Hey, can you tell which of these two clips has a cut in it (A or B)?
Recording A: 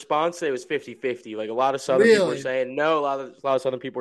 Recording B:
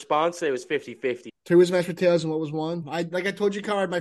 B